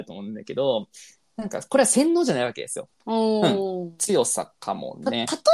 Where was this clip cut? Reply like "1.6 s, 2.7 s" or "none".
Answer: 2.9 s